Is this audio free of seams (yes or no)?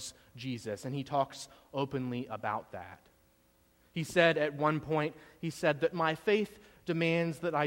yes